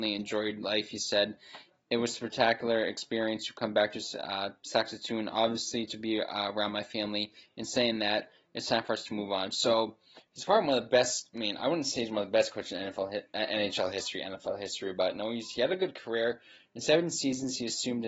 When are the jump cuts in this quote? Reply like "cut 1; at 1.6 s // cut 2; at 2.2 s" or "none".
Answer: none